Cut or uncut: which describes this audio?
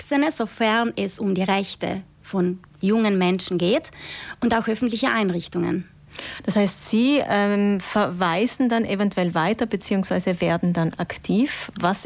uncut